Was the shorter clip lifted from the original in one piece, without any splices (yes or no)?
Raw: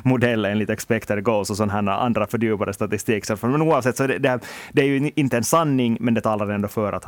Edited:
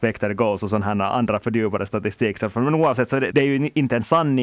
no